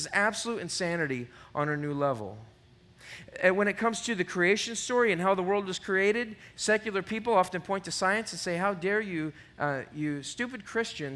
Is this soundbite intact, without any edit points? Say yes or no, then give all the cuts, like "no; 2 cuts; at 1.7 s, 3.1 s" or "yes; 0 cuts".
yes; 0 cuts